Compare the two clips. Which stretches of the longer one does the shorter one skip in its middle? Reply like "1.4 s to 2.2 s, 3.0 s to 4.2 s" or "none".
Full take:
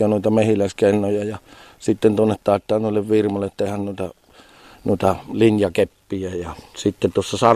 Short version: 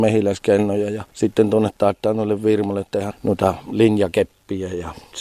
1.4 s to 1.7 s, 3.8 s to 4.7 s